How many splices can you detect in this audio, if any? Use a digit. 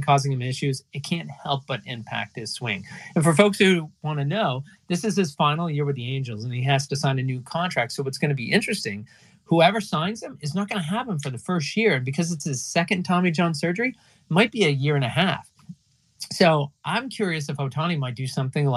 0